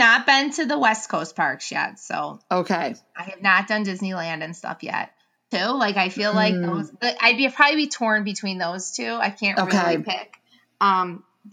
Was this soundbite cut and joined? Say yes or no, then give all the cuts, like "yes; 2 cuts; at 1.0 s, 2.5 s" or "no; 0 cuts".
yes; 1 cut; at 5.5 s